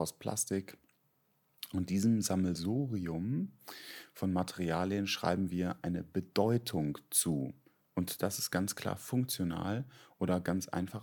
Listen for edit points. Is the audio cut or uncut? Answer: uncut